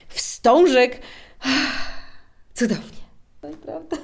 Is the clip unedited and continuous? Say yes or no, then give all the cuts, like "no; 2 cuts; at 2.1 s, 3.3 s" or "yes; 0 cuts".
yes; 0 cuts